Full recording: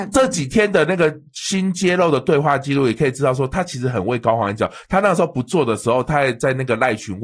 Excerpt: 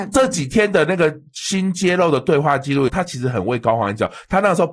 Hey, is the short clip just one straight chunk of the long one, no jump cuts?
no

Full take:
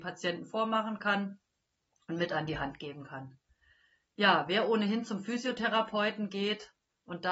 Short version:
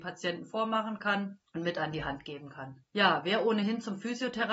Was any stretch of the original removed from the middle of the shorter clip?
yes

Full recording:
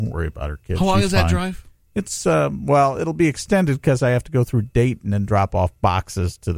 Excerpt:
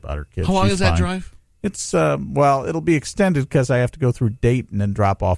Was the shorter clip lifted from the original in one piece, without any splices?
yes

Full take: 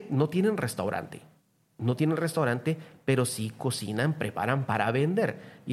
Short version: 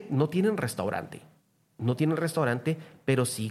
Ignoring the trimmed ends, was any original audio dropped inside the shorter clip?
no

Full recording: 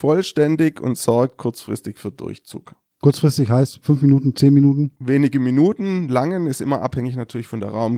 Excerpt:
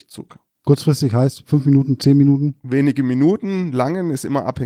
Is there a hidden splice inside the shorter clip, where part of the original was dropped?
no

